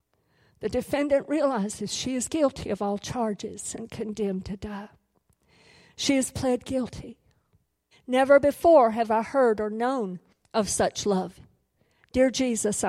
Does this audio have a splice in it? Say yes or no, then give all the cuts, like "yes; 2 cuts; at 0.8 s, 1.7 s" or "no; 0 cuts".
yes; 1 cut; at 7.9 s